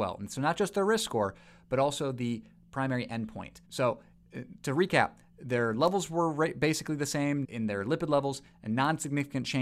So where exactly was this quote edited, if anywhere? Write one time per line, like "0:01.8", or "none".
0:03.7
0:07.4